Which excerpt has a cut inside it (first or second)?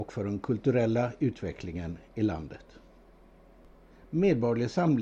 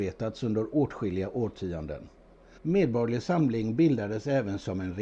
second